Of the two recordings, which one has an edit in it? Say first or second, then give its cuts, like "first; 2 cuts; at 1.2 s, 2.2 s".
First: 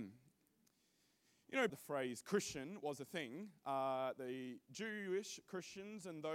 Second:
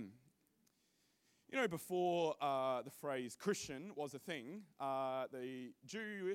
first; 1 cut; at 1.7 s